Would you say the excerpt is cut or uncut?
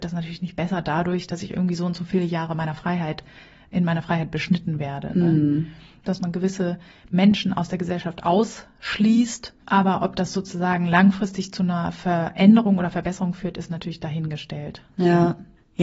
cut